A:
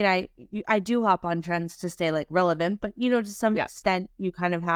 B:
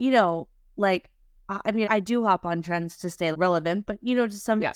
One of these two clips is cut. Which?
B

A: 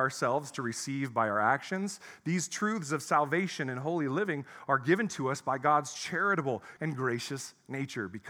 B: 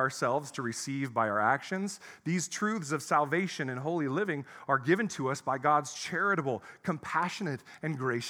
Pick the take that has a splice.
A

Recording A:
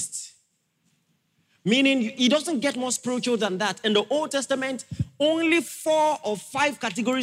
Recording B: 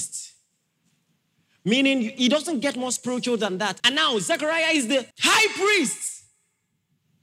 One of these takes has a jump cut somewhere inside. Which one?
B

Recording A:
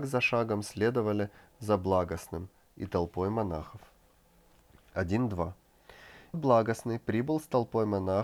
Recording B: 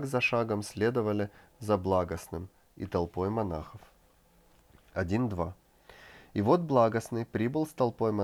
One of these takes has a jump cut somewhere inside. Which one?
A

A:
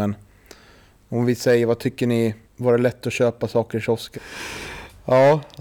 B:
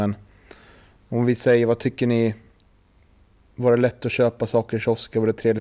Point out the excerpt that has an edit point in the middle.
A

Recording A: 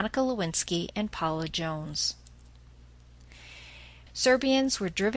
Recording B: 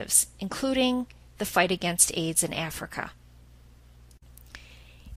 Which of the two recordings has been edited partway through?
A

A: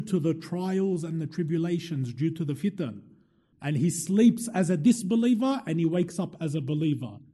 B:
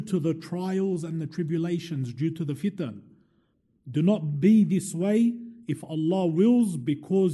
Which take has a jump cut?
A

